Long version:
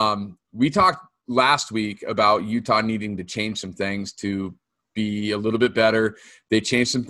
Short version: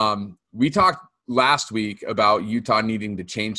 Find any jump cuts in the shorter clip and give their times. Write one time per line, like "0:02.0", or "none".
none